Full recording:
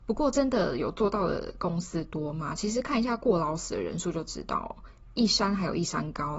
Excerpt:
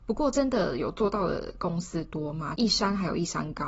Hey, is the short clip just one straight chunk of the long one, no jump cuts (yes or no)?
no